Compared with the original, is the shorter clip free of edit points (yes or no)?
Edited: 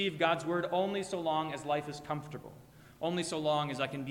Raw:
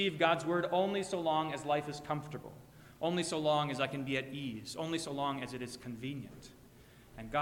yes